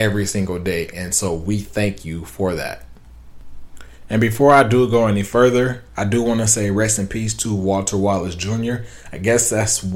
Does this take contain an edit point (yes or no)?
no